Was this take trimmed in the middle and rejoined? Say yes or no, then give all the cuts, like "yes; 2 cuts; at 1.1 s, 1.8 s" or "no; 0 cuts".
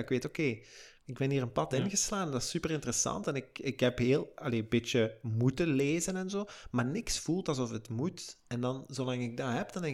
no; 0 cuts